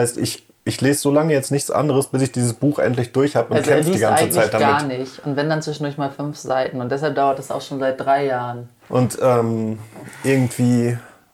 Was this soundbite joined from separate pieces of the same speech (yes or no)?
yes